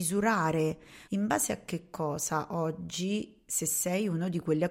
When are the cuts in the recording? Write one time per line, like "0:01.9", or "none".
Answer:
0:01.1